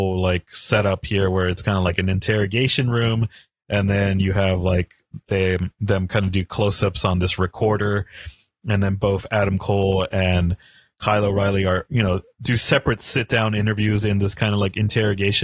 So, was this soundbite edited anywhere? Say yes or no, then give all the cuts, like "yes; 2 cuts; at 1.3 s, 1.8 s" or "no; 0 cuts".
no; 0 cuts